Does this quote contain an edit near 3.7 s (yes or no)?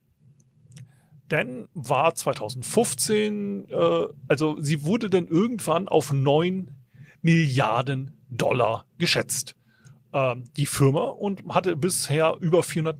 no